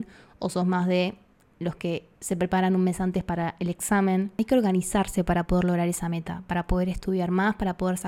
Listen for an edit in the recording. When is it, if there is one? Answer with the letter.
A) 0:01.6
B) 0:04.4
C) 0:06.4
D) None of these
D